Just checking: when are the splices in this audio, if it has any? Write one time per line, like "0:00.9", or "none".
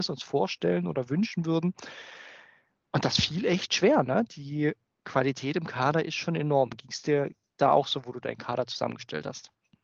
0:04.3